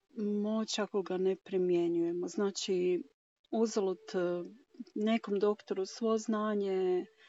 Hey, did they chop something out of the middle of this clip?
no; 0 cuts

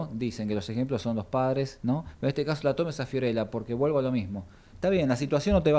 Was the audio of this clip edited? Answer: yes; 1 cut; at 4.7 s

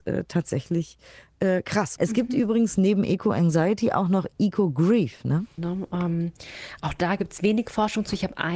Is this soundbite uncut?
no; 2 cuts; at 2.0 s, 5.6 s

